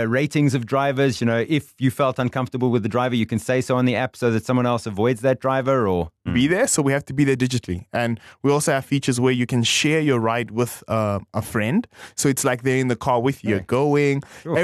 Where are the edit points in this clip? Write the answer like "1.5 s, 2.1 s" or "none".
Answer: 1.1 s, 6.3 s, 13.5 s

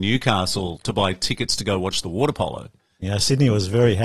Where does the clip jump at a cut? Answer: 3.0 s

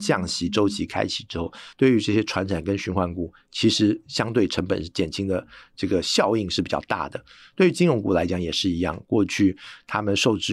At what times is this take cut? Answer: none

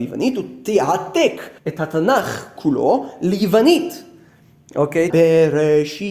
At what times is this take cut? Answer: 1.6 s, 5.1 s

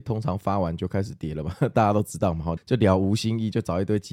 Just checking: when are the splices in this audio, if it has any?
2.6 s

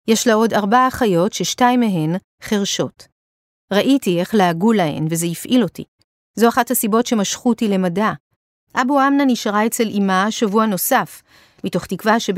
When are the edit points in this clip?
8.6 s

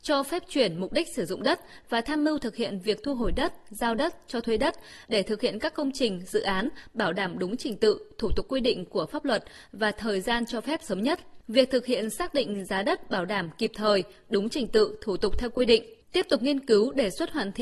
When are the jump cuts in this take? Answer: none

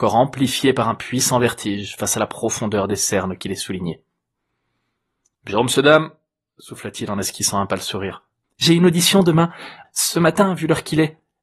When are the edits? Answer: 8.4 s, 9.8 s

